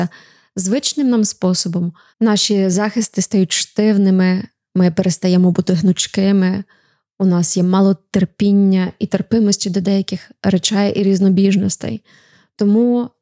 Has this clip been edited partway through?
yes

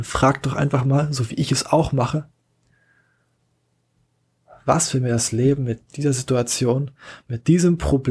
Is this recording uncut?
yes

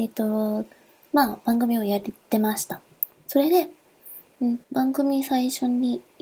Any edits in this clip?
yes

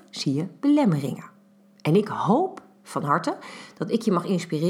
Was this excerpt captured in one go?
yes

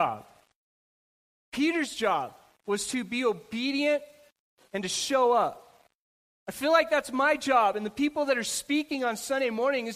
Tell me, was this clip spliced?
no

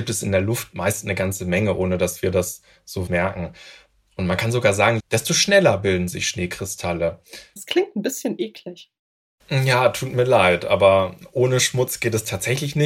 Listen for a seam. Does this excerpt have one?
yes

